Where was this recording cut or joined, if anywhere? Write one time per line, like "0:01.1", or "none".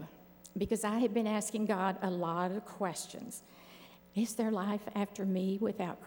0:04.0